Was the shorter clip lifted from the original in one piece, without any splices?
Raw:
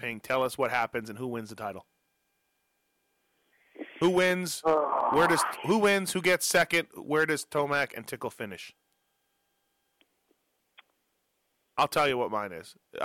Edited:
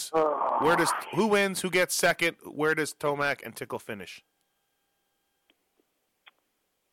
yes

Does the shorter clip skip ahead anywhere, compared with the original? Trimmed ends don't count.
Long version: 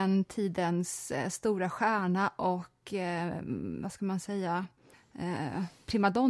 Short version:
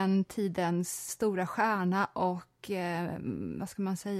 yes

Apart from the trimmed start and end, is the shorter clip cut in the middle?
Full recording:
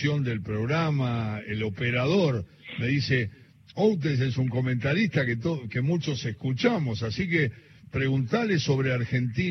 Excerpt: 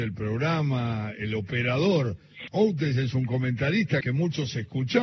yes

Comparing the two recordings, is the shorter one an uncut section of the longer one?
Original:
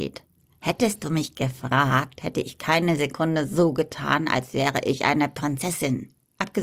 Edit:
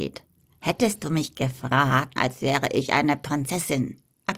no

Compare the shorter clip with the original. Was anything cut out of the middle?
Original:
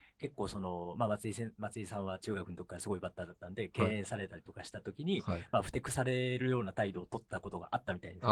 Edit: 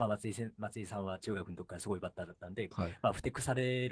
yes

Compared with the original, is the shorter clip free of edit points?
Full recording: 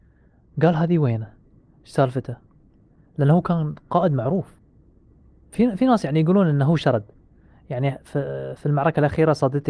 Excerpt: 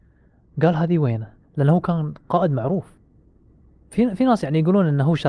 no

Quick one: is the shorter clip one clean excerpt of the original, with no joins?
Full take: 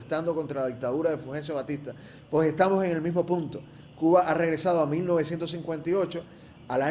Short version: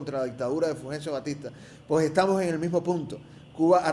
yes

